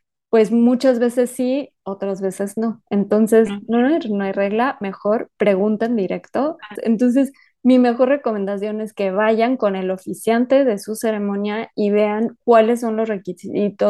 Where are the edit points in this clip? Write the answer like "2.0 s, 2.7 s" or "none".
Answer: 6.7 s